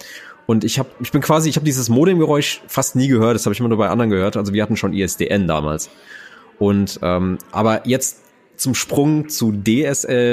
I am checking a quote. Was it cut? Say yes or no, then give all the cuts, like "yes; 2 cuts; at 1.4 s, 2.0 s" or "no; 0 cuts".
no; 0 cuts